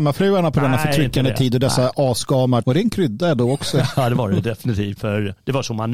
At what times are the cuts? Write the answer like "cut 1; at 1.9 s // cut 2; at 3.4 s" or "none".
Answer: cut 1; at 2.6 s // cut 2; at 5.0 s